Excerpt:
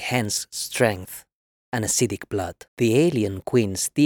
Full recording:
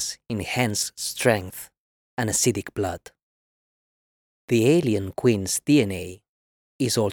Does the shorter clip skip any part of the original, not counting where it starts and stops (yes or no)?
yes